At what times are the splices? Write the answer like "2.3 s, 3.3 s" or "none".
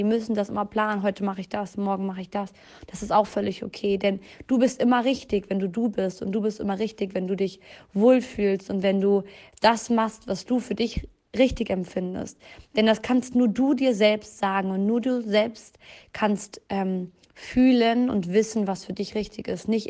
none